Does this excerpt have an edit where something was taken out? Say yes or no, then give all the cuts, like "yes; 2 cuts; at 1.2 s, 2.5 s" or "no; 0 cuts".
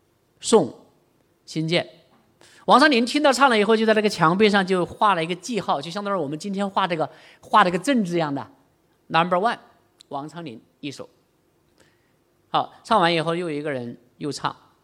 no; 0 cuts